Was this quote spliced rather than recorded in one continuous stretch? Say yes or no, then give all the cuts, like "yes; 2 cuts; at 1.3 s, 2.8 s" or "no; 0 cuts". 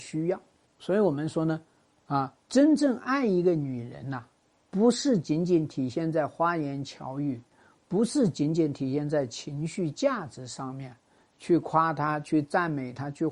yes; 1 cut; at 2.4 s